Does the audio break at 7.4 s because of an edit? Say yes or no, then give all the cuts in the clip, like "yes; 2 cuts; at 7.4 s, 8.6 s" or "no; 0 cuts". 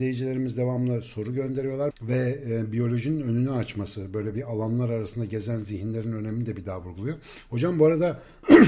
no; 1 cut; at 1.9 s